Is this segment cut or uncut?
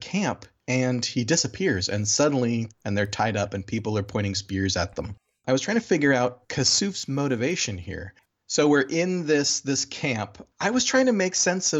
cut